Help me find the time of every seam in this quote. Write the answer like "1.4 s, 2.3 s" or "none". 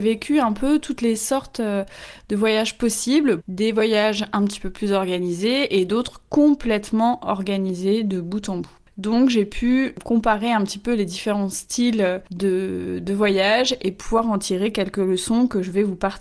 3.4 s